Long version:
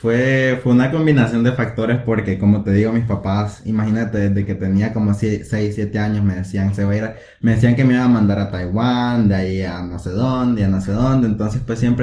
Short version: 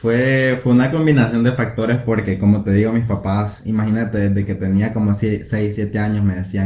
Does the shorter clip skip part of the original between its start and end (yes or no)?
no